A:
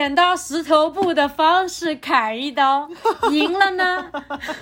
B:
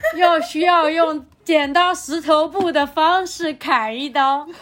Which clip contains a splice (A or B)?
B